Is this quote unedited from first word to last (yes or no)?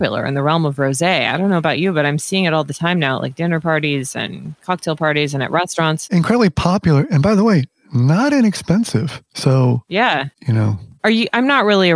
yes